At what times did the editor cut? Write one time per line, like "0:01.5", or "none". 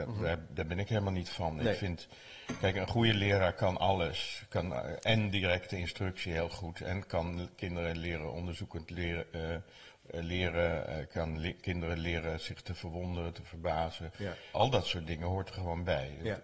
0:14.5